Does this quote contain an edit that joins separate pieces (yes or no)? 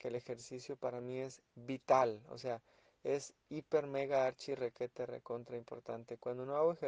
no